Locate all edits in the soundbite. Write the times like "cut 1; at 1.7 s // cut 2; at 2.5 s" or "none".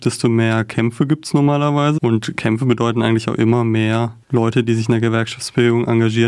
cut 1; at 2.0 s // cut 2; at 4.2 s